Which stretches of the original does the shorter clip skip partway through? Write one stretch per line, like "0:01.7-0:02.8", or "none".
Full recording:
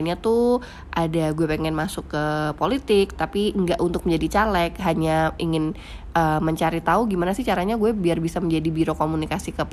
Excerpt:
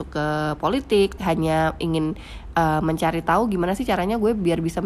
0:03.2-0:04.8